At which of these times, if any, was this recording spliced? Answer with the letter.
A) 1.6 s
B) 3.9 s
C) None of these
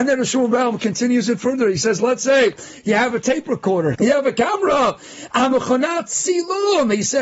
B